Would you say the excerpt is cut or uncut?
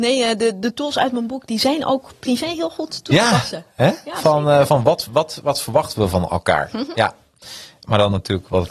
uncut